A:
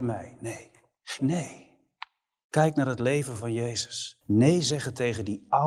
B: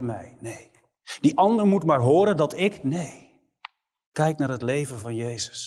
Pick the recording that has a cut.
A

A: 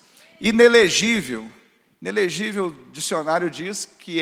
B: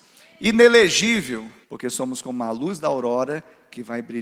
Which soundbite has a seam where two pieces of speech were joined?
B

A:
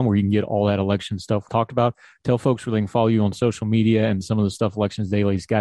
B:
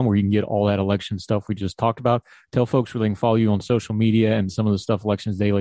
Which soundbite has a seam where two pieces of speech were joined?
A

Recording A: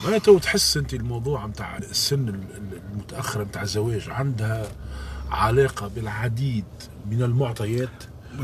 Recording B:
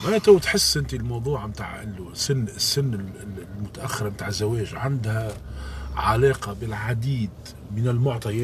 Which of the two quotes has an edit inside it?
A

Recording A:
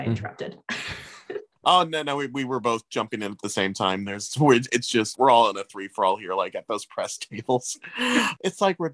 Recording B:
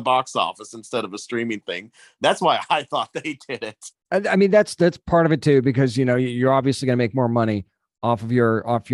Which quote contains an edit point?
A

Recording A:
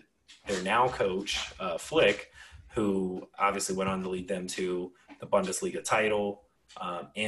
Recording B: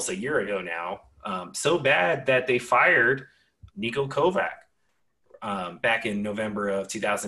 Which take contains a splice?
B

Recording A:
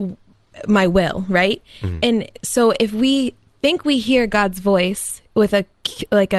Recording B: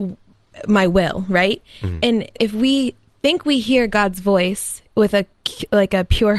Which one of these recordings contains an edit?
B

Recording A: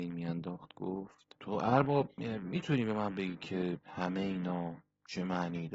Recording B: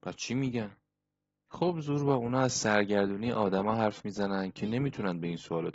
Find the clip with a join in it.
A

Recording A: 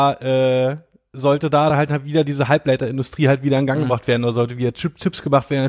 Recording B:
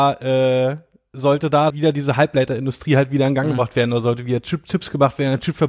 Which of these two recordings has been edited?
B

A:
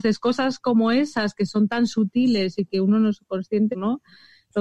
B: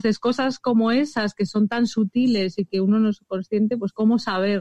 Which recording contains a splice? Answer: A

